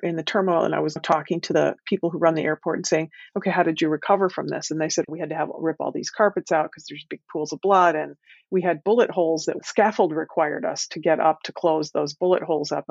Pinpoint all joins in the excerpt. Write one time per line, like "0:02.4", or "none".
0:05.1